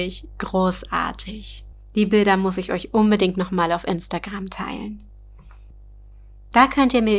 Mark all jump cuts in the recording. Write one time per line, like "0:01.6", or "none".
none

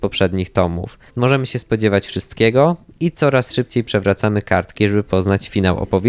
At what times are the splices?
0:01.1

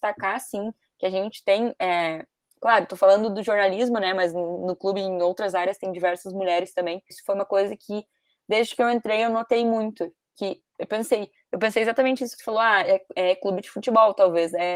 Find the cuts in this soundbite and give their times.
0:07.1

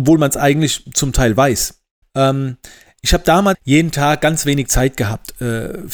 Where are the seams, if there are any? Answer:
0:02.0
0:03.5

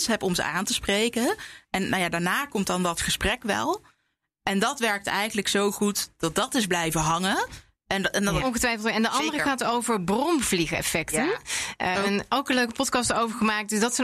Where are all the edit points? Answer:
0:08.4
0:11.9

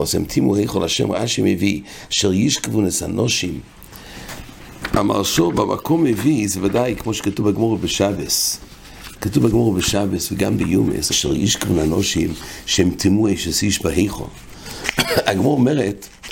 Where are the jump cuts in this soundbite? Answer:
0:11.1

